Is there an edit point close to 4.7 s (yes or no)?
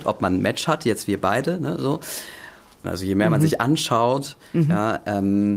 no